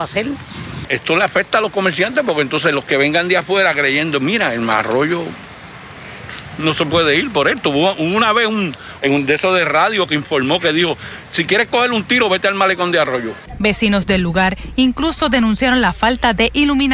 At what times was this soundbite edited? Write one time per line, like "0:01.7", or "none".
0:09.0

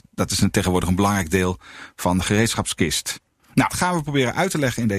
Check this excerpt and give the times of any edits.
0:03.7

